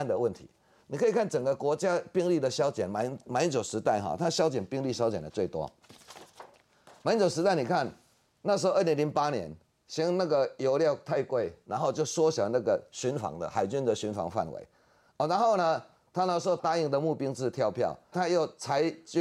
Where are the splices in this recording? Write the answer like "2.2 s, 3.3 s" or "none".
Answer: 16.6 s, 18.1 s